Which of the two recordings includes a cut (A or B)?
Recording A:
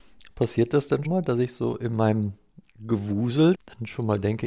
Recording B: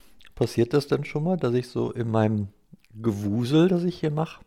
A